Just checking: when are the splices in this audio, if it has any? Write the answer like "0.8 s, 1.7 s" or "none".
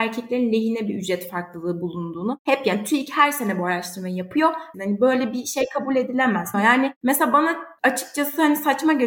4.7 s, 6.5 s